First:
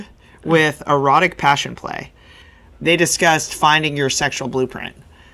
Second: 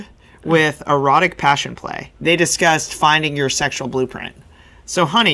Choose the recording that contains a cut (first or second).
second